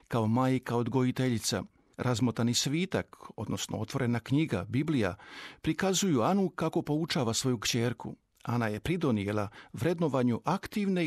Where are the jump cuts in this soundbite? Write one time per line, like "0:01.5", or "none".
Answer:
none